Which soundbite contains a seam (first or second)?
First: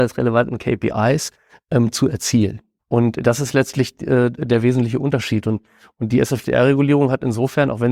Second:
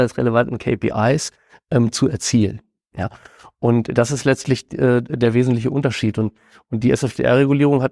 first